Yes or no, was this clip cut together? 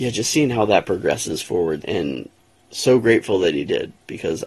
yes